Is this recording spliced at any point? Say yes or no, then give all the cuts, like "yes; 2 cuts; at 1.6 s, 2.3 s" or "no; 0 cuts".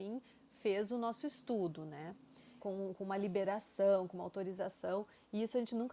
yes; 1 cut; at 2.6 s